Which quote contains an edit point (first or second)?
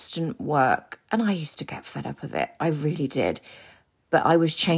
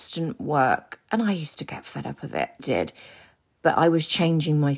second